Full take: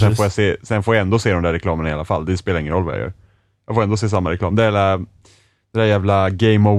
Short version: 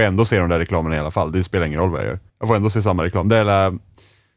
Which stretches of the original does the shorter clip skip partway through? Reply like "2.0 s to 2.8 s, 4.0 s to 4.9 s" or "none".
3.2 s to 3.6 s